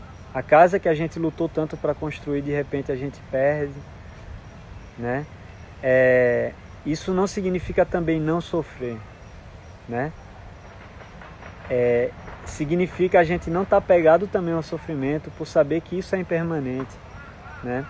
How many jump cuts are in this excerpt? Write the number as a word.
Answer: zero